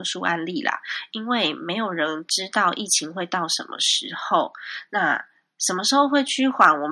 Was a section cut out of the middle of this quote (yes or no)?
no